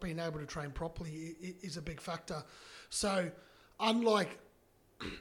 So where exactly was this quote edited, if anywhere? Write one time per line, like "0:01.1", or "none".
none

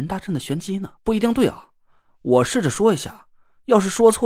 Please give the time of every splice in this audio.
0:01.0

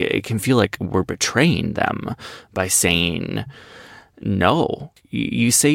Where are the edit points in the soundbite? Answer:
none

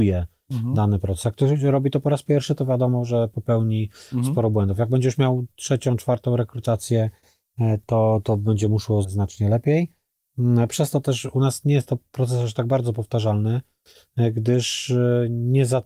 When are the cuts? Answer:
0:09.0

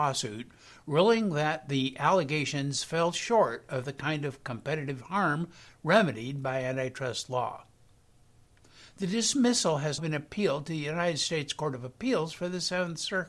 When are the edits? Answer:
0:10.0

